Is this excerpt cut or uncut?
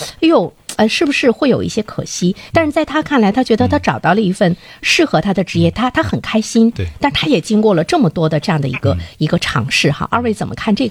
uncut